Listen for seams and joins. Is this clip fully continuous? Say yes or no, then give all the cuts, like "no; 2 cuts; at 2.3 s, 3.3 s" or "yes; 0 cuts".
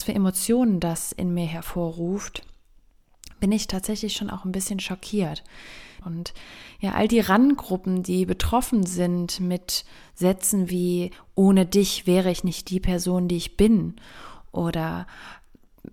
no; 1 cut; at 6.0 s